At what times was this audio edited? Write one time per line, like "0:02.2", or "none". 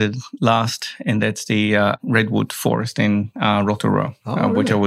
none